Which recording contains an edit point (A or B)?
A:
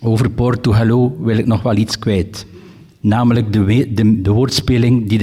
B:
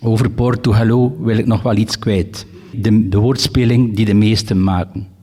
B